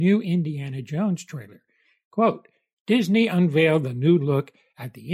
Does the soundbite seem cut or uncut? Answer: uncut